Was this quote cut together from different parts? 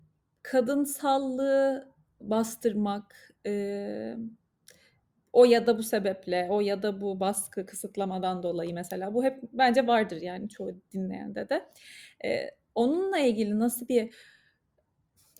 no; 0 cuts

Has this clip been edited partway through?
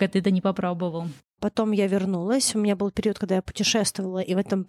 yes; 1 cut; at 1.4 s

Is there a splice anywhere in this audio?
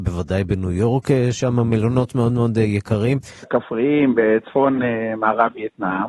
yes; 1 cut; at 3.4 s

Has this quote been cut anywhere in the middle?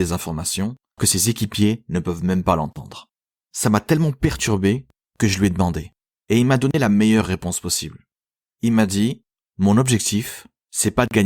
yes; 1 cut; at 1.0 s

